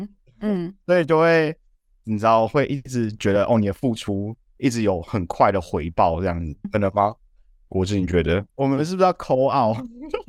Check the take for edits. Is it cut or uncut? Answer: cut